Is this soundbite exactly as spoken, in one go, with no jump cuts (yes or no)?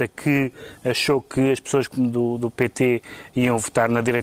no